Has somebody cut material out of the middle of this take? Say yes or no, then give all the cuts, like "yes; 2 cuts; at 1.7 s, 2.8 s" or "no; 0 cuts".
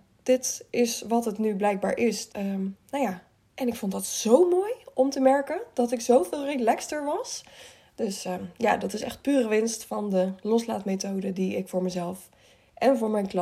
yes; 1 cut; at 2.3 s